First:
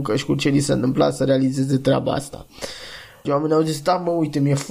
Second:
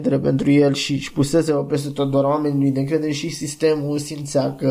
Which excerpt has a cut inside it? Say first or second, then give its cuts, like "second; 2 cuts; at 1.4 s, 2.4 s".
first; 1 cut; at 3.3 s